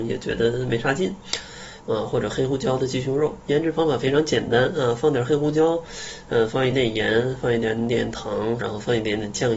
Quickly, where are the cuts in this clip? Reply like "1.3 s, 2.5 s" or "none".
1.8 s, 6.7 s, 8.6 s